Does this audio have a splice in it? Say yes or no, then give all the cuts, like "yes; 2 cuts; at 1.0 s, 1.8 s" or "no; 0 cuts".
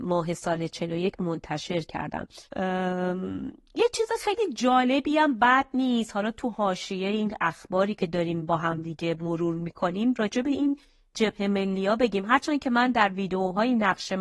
yes; 1 cut; at 2.5 s